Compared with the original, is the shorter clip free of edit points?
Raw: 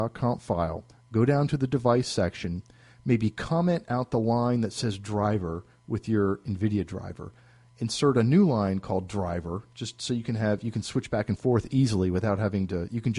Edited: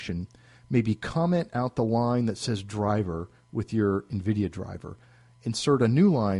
yes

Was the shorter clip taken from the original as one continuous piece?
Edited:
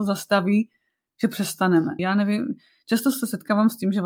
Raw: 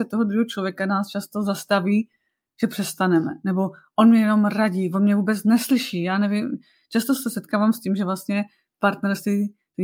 no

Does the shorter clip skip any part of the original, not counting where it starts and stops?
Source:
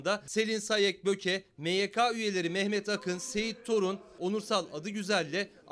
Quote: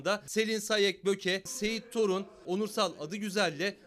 yes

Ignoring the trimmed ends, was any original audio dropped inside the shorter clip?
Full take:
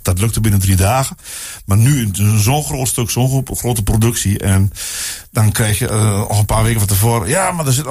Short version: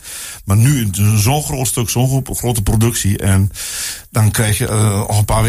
no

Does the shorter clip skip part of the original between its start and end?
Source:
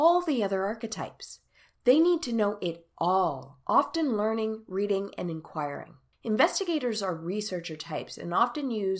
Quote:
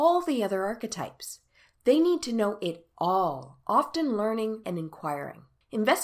yes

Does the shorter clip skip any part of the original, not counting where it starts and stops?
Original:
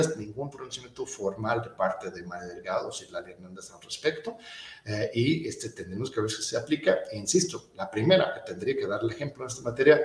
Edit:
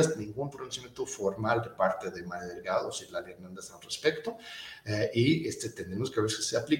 no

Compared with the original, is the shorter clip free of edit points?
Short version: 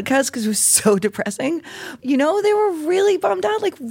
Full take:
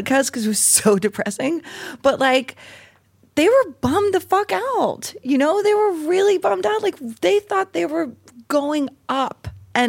no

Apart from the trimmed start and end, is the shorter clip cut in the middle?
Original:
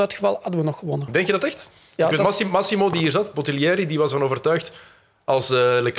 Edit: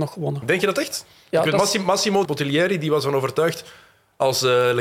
yes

